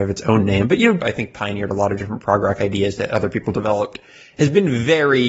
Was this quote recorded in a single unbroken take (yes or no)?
no